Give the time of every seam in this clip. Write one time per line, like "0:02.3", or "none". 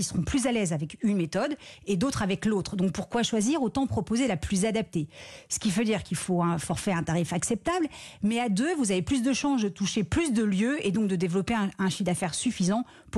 none